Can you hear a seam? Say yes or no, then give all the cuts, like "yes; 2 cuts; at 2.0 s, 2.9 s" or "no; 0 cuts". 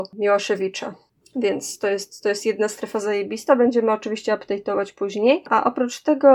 no; 0 cuts